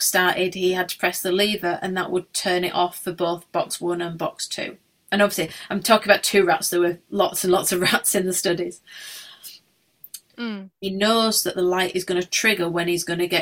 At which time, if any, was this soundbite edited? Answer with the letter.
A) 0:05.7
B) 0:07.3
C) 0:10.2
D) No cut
C